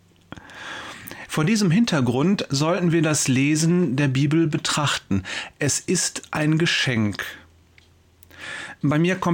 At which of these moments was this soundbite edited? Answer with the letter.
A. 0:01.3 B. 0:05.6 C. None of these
A